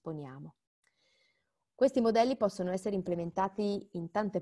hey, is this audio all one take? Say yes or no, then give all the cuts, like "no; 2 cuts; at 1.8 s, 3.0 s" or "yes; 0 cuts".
no; 1 cut; at 1.7 s